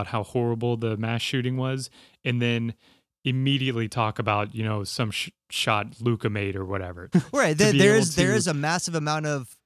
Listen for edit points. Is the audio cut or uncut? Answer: cut